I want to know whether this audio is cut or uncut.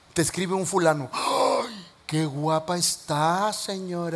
uncut